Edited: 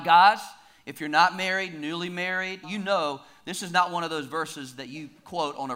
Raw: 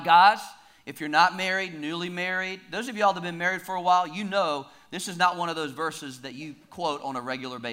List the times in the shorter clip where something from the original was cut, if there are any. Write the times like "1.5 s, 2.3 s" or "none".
2.6 s